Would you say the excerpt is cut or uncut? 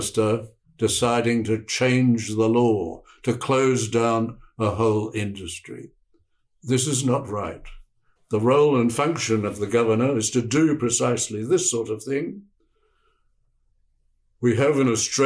cut